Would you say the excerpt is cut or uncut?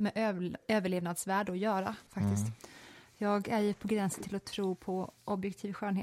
cut